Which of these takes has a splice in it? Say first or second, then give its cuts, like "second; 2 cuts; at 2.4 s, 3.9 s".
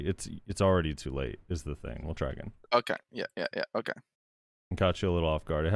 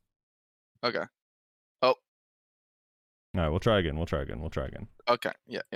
first; 1 cut; at 2.0 s